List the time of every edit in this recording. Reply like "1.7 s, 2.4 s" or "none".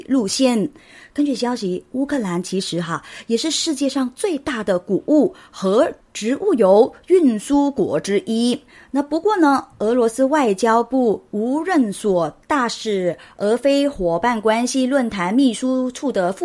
none